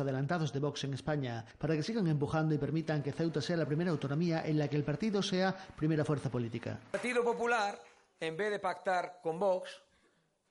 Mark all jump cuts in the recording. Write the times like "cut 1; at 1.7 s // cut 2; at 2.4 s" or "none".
none